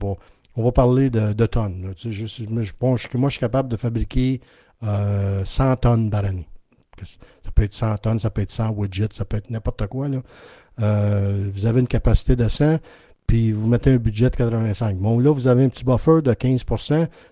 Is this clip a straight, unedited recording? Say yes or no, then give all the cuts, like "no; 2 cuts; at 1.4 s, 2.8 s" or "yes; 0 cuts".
yes; 0 cuts